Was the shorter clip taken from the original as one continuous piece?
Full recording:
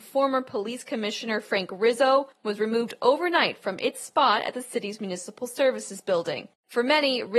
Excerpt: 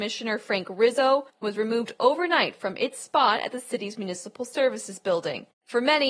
yes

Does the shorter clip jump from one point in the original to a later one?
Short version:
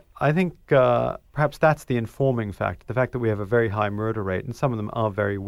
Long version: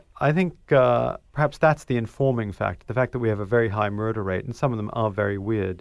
no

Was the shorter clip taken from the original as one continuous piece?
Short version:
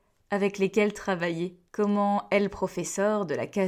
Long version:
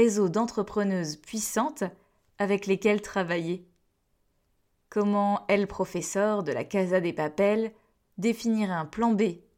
no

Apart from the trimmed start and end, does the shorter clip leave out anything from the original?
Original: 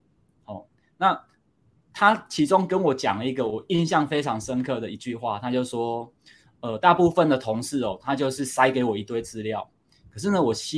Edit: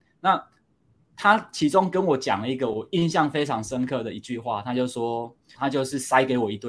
yes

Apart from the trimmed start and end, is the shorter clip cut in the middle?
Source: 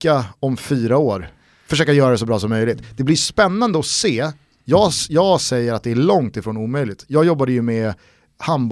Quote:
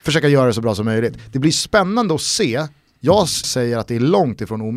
yes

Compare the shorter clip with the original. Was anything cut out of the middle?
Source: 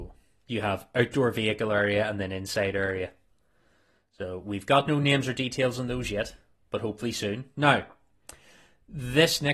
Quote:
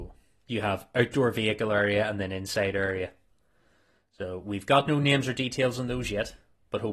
no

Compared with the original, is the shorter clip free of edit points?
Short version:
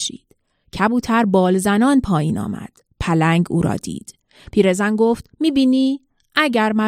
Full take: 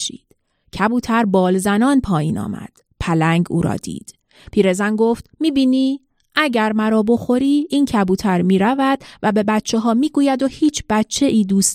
yes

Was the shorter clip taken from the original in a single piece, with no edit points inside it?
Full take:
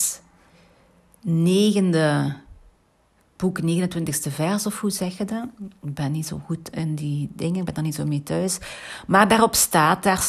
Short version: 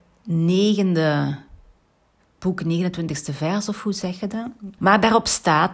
no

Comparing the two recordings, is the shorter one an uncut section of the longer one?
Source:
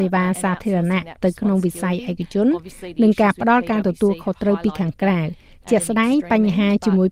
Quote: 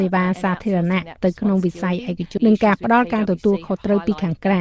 no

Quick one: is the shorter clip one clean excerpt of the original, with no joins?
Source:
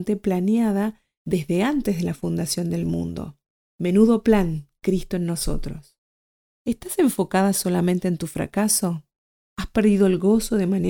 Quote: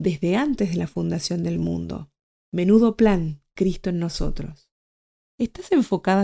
yes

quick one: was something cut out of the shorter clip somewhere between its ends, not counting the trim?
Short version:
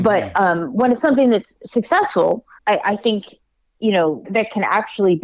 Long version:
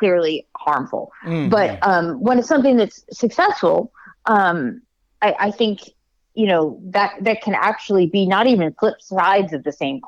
yes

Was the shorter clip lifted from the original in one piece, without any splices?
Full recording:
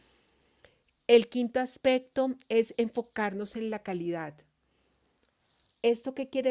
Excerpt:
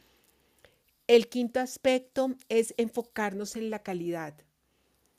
yes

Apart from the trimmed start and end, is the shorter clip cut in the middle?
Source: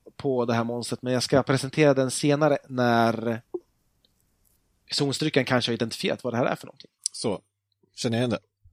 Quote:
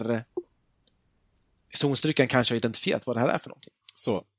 no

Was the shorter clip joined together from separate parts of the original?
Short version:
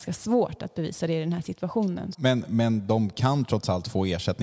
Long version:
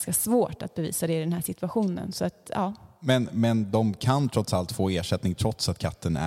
yes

